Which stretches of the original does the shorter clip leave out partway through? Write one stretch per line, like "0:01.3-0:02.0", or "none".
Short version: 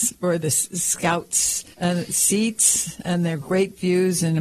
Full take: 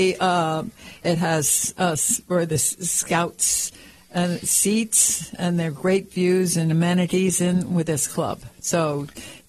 0:03.8-0:04.0